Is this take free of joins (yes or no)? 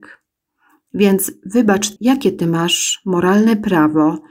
no